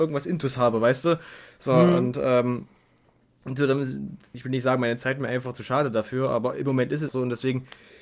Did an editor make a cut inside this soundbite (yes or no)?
yes